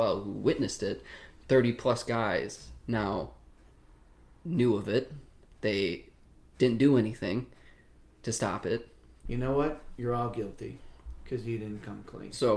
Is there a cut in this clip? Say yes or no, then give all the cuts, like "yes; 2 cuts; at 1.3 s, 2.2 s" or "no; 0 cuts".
yes; 1 cut; at 9.3 s